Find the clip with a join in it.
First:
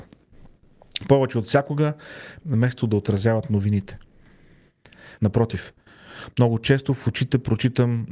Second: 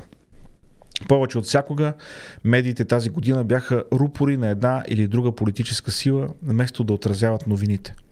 first; 2 cuts; at 2.4 s, 5.2 s

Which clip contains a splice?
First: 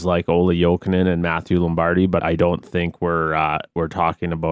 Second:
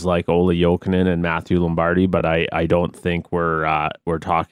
first; 1 cut; at 2.2 s

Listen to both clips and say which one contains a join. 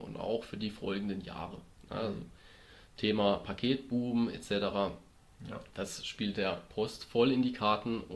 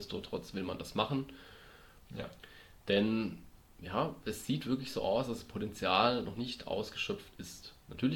second; 1 cut; at 2.1 s

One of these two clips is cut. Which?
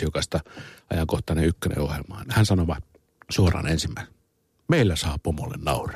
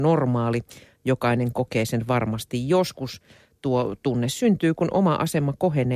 first; 1 cut; at 2.2 s

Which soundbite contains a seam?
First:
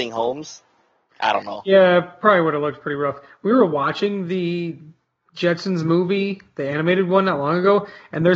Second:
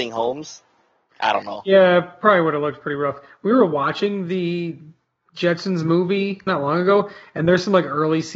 second; 1 cut; at 6.5 s

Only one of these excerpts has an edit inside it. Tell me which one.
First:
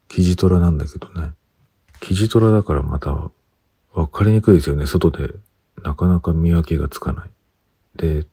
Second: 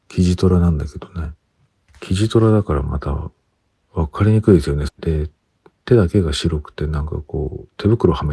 second; 1 cut; at 4.9 s

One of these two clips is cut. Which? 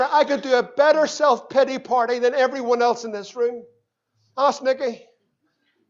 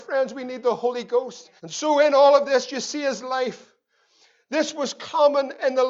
second; 1 cut; at 1.6 s

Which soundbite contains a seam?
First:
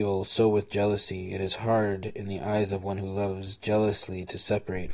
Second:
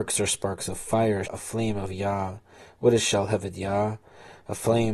second; 1 cut; at 1.3 s

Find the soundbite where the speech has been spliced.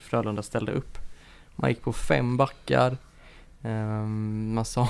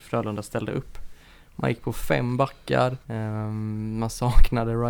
second; 1 cut; at 3.0 s

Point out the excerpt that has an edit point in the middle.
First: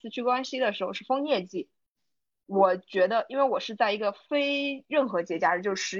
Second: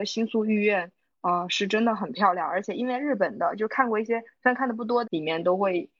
second; 1 cut; at 5.0 s

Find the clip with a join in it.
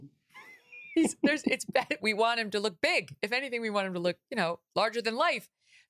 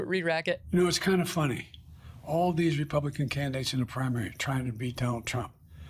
first; 1 cut; at 2.0 s

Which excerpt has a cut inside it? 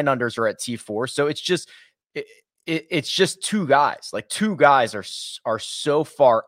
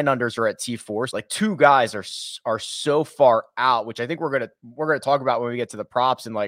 second; 1 cut; at 1.1 s

